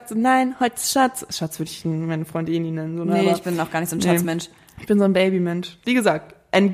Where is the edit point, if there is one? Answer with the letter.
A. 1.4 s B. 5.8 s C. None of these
B